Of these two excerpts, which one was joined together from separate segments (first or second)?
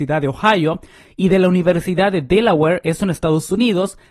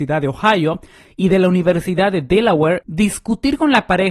second